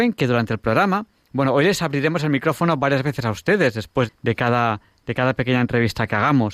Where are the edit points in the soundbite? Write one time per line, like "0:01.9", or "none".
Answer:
0:04.1